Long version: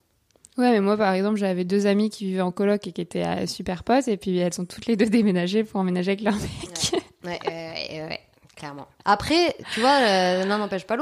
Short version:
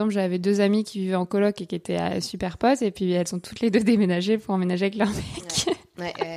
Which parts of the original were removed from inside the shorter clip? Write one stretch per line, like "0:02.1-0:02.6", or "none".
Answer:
none